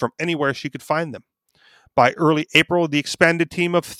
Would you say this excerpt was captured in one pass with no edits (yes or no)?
yes